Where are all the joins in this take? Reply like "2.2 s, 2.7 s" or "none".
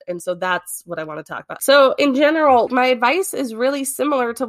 1.6 s, 2.7 s